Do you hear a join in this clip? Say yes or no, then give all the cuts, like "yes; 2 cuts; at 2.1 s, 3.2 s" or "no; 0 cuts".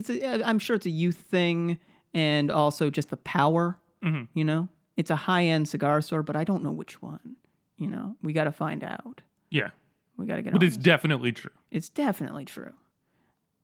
no; 0 cuts